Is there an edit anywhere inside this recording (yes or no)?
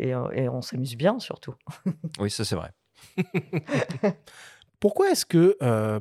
no